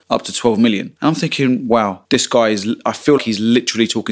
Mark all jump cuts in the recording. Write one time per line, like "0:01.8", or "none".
0:01.0
0:03.2